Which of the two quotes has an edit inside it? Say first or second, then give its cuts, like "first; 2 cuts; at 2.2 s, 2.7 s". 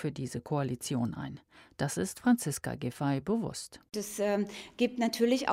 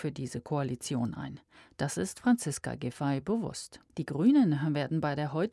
second; 1 cut; at 3.9 s